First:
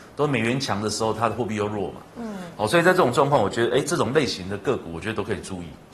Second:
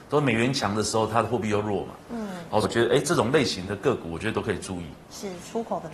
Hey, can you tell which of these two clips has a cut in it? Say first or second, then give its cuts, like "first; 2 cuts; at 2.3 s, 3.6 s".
second; 1 cut; at 2.6 s